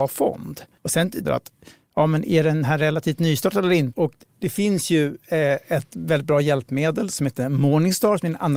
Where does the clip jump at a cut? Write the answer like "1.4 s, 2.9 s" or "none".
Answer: 1.2 s, 3.9 s